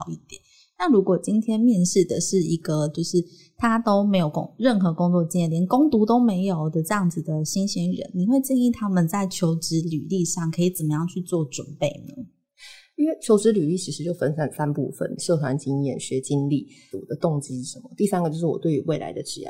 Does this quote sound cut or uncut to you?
cut